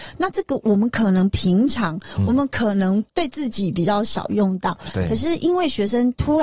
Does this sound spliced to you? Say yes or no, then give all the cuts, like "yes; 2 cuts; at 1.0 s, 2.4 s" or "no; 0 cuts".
no; 0 cuts